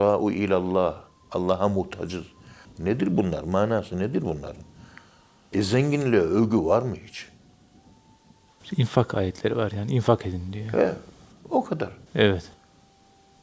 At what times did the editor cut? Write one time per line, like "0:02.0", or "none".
0:02.7
0:05.5